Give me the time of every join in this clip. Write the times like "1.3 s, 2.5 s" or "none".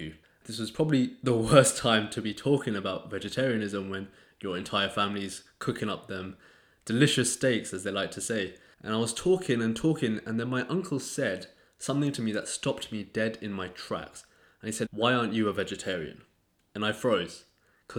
14.8 s